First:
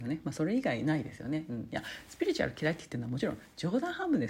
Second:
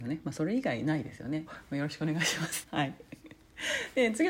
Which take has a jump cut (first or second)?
second